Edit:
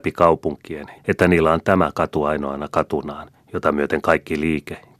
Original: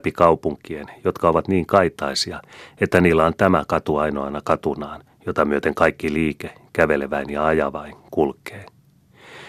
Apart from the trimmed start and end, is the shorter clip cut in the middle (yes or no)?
yes